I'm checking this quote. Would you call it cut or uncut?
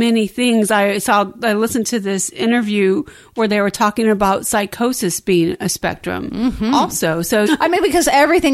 cut